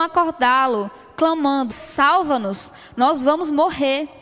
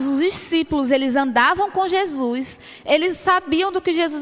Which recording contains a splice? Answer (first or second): first